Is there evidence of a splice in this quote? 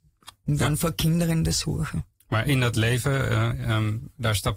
no; 0 cuts

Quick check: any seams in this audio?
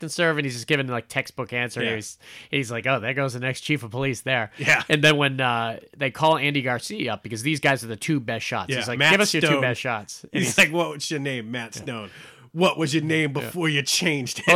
no; 0 cuts

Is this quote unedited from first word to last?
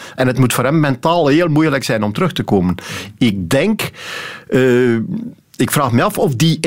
yes; 0 cuts

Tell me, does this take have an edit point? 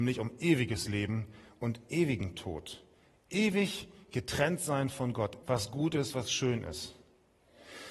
yes; 1 cut; at 5.4 s

